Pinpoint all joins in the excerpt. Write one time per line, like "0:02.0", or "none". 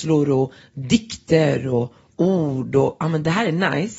0:03.0